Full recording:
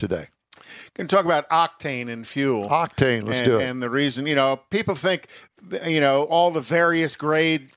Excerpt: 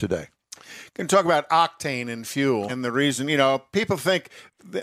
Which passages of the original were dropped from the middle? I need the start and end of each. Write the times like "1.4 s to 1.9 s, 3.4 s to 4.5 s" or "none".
2.7 s to 3.7 s